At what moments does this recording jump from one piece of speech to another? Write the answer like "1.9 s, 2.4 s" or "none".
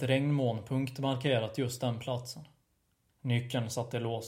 3.1 s